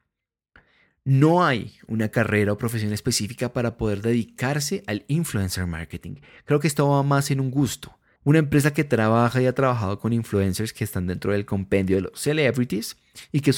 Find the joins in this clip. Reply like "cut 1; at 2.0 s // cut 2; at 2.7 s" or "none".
cut 1; at 8.2 s